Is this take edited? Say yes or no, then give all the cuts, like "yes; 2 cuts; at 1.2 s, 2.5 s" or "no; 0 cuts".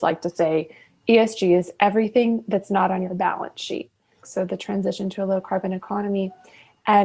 yes; 1 cut; at 4.2 s